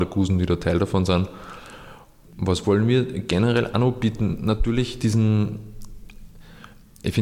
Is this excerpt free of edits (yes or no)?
no